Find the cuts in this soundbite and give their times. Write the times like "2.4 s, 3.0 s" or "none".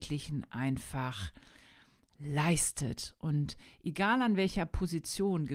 none